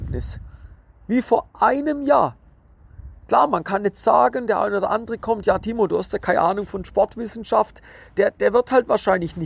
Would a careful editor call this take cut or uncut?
uncut